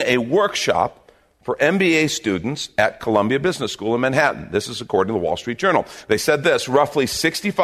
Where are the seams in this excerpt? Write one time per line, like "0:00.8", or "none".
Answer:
none